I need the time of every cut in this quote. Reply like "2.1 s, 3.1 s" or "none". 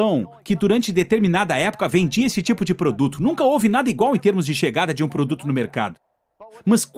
none